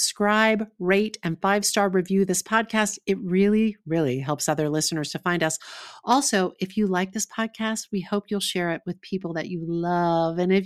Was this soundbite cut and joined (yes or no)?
no